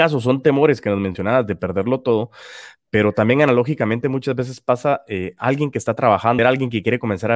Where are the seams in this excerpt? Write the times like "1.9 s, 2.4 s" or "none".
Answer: 6.4 s